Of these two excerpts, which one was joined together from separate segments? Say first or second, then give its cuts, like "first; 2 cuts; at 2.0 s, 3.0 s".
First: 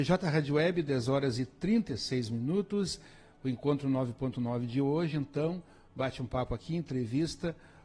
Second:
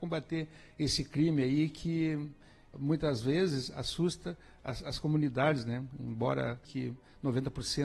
second; 2 cuts; at 2.7 s, 6.6 s